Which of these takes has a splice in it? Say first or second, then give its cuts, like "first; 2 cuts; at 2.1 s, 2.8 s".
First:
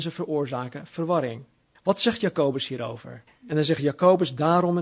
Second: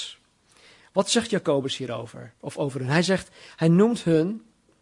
first; 2 cuts; at 1.7 s, 3.3 s